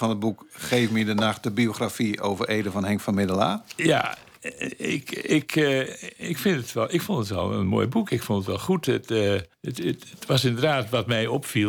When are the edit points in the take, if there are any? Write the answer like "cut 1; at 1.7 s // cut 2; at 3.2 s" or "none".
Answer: cut 1; at 9.5 s